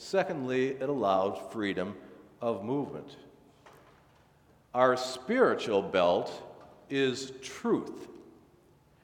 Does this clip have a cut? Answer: no; 0 cuts

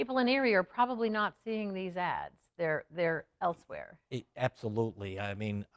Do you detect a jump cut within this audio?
no; 0 cuts

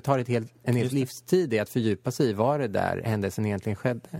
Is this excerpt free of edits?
yes; 0 cuts

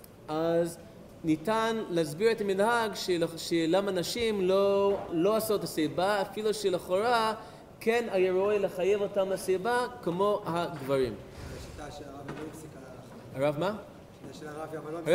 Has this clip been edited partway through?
yes; 1 cut; at 5.1 s

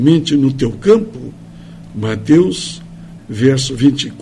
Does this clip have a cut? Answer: yes; 2 cuts; at 1.8 s, 3.2 s

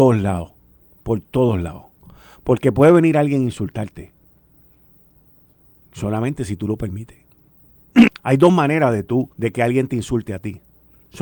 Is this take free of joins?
no; 2 cuts; at 8.1 s, 9.3 s

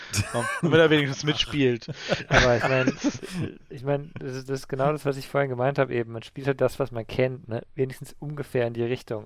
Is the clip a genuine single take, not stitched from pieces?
yes; 0 cuts

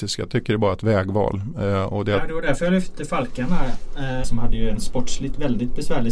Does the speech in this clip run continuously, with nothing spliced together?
no; 1 cut; at 4.2 s

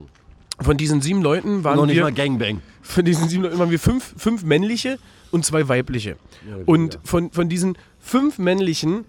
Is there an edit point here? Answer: no; 0 cuts

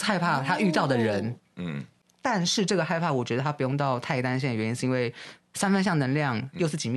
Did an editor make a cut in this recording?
no; 0 cuts

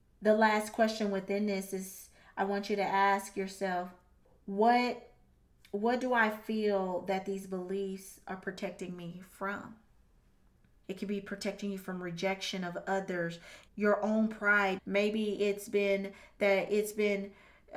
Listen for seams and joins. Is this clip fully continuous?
no; 3 cuts; at 10.8 s, 13.7 s, 14.8 s

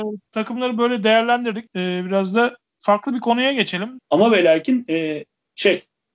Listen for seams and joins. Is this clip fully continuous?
no; 2 cuts; at 1.7 s, 4.0 s

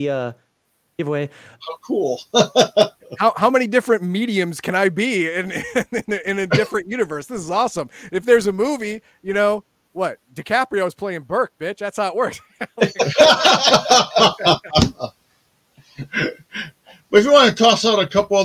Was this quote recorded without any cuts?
no; 1 cut; at 1.6 s

